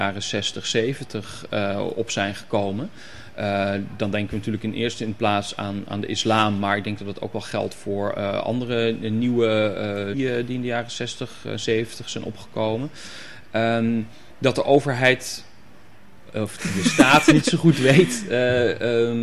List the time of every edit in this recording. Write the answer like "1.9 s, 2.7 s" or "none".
10.1 s